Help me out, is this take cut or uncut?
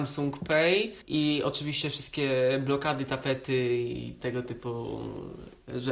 cut